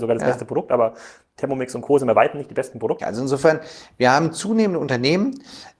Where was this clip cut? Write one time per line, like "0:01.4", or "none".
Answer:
0:03.0